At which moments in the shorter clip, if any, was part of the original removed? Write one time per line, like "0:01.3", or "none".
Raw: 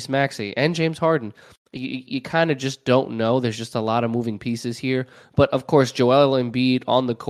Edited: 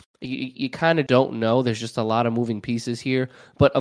0:01.1